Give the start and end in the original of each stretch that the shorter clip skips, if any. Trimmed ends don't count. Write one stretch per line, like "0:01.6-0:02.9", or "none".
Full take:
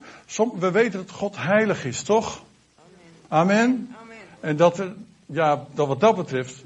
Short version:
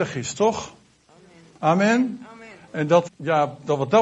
0:04.8-0:05.2